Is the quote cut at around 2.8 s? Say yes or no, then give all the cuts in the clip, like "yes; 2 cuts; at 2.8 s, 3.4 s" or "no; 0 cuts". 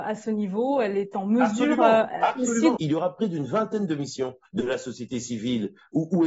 yes; 2 cuts; at 2.8 s, 4.5 s